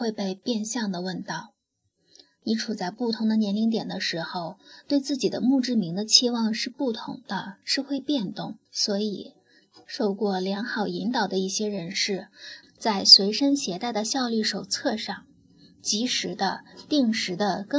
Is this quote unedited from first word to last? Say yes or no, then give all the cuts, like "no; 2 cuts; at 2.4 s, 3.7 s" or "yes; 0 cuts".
no; 2 cuts; at 8.7 s, 12.6 s